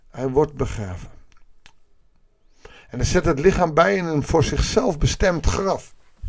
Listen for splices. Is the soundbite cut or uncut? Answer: uncut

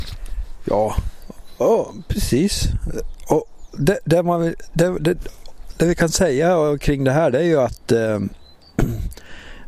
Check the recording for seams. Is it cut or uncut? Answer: uncut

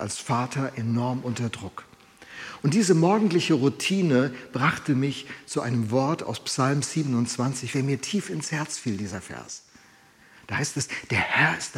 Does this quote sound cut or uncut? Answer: cut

